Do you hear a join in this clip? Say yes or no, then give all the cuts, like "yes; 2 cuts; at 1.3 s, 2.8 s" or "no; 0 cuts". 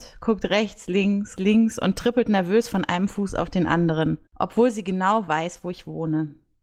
yes; 2 cuts; at 1.4 s, 4.3 s